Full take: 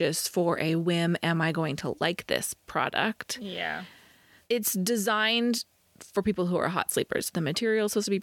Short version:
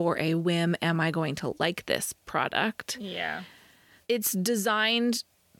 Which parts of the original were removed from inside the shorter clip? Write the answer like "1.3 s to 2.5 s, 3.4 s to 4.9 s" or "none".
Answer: none

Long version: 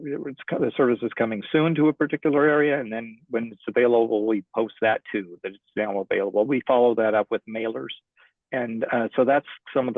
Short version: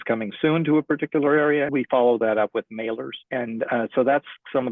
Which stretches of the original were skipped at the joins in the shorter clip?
2.8 s to 6.5 s, 8.0 s to 8.4 s

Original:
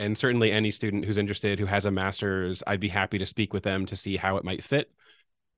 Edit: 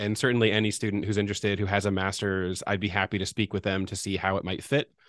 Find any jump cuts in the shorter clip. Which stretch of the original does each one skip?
none

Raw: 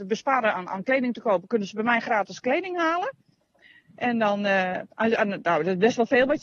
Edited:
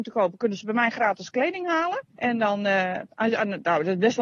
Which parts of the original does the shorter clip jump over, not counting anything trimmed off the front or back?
3.2 s to 3.9 s

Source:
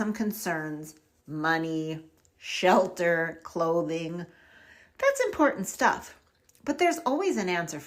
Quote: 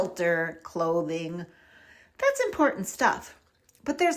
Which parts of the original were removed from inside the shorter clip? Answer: none

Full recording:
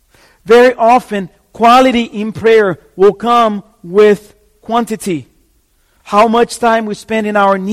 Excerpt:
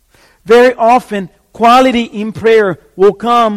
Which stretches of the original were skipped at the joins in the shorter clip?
none

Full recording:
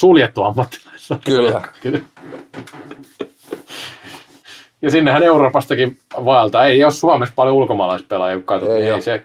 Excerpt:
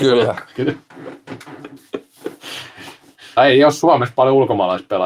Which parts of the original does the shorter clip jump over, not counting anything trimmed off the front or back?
4.6 s to 6.6 s

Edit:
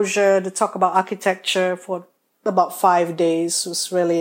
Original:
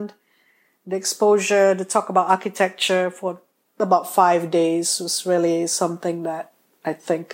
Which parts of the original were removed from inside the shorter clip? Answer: none

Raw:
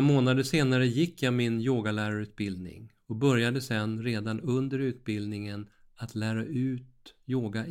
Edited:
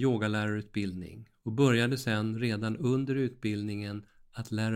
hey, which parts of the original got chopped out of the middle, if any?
none

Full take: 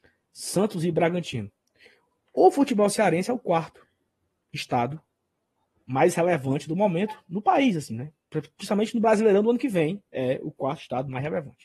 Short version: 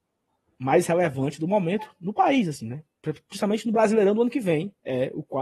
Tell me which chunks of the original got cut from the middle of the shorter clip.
none

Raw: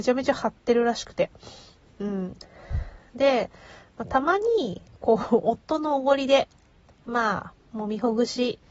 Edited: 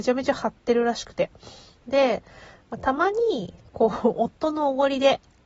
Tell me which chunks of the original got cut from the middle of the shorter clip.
1.8 s to 3.1 s

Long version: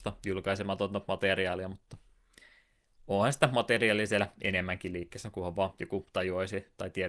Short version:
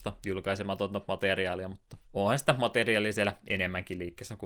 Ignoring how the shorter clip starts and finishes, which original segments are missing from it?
2.0 s to 3.0 s

